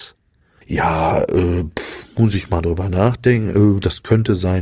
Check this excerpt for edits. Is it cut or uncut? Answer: uncut